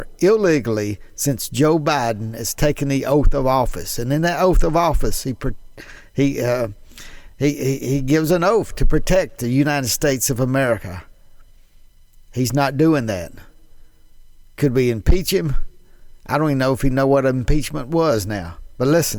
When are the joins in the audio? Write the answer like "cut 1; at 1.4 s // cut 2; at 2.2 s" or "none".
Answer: none